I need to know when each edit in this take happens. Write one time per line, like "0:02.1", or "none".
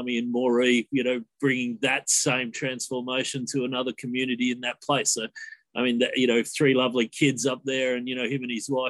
none